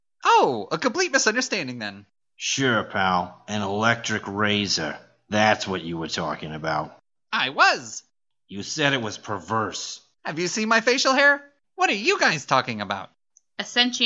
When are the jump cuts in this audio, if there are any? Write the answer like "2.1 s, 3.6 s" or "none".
10.2 s, 11.6 s